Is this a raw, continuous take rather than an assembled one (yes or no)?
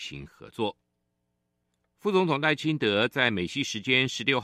yes